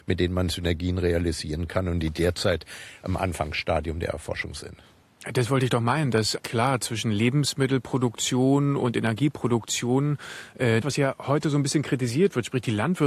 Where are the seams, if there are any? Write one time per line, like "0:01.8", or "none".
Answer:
0:06.4
0:10.8